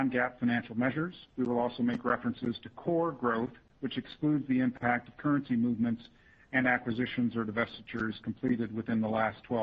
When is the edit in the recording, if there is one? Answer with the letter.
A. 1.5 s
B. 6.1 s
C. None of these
C